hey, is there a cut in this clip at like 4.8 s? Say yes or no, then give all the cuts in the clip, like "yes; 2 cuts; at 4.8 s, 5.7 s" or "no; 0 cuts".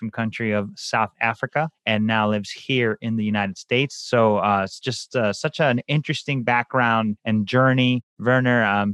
no; 0 cuts